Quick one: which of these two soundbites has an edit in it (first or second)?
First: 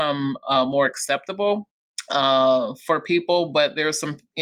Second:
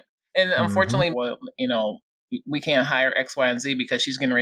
second